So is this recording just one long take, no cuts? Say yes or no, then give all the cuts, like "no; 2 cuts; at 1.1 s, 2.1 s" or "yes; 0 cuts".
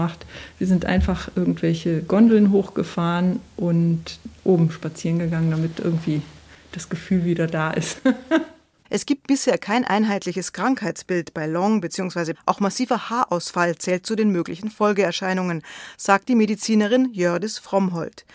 no; 1 cut; at 12.3 s